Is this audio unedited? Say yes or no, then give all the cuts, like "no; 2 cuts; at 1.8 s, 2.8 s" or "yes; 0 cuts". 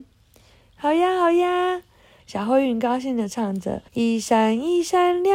no; 2 cuts; at 2.2 s, 3.9 s